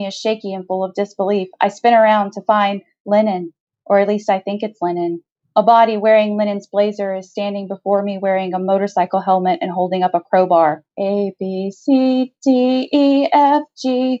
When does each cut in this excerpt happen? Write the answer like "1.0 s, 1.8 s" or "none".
10.9 s